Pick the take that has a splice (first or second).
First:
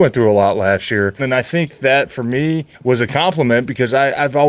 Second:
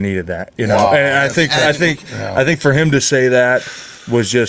first